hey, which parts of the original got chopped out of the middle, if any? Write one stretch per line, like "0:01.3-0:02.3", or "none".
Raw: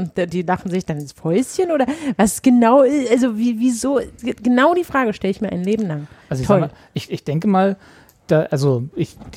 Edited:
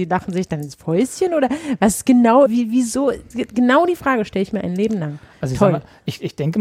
0:02.8-0:03.3